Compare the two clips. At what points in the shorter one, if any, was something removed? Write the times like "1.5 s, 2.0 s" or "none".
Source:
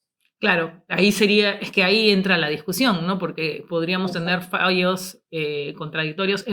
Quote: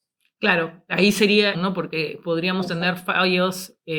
1.5 s